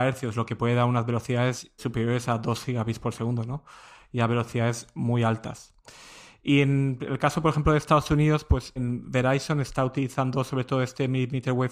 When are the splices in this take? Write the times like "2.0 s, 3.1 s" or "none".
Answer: 1.8 s, 8.8 s